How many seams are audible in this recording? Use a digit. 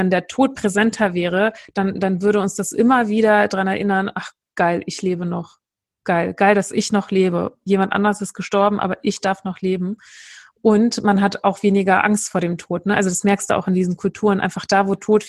0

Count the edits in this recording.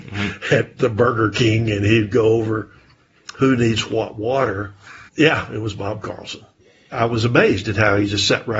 1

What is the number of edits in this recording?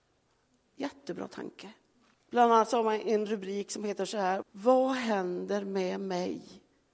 2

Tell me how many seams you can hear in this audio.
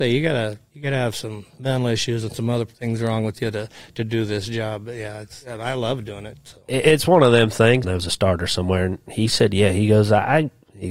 2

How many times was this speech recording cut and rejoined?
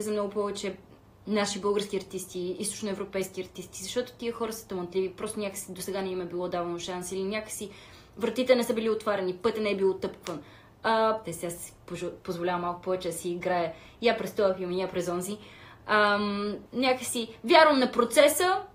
2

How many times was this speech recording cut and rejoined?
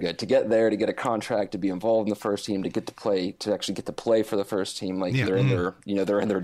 1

